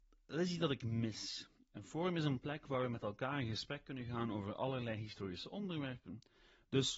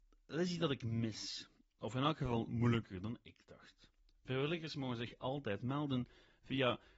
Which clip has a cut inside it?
second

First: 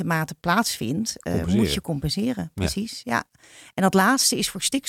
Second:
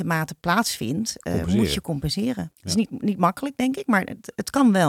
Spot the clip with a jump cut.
second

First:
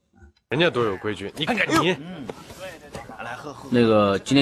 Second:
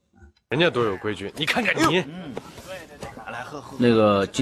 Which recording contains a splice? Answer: first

